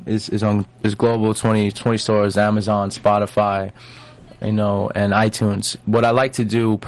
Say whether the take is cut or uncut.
uncut